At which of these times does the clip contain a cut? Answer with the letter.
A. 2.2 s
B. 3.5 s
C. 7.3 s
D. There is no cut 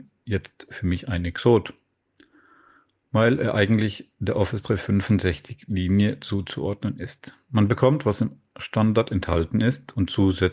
D